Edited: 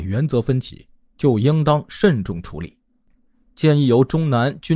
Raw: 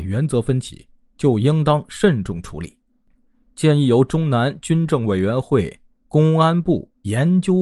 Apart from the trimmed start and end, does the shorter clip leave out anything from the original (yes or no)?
no